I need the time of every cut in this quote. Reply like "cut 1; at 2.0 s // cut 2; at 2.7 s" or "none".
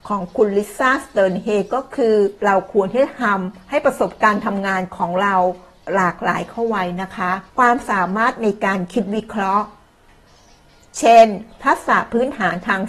cut 1; at 2.4 s // cut 2; at 7.5 s

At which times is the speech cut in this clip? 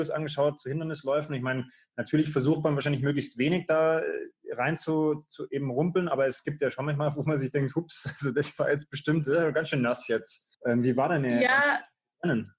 cut 1; at 10.5 s

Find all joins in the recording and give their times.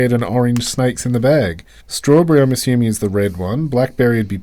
cut 1; at 1.8 s

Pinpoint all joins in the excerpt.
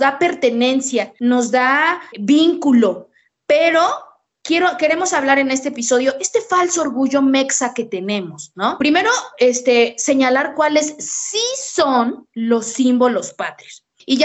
cut 1; at 2.1 s

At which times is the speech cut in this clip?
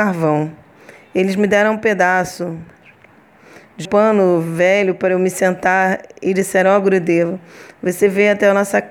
cut 1; at 3.8 s

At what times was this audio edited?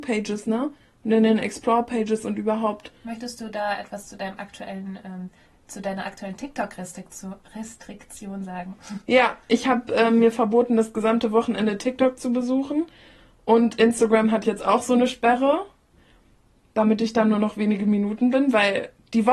none

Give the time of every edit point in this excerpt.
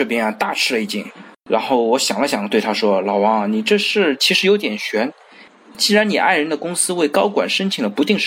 cut 1; at 1.3 s

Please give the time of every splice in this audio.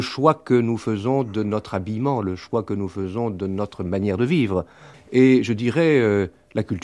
cut 1; at 4.9 s

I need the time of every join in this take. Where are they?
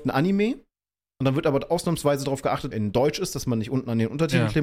cut 1; at 2.7 s

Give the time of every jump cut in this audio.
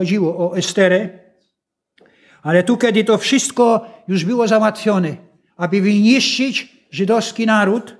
none

